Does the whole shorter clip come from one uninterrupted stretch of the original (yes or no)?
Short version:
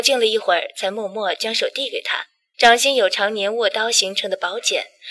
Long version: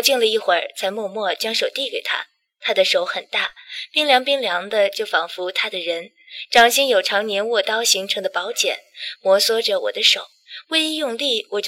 no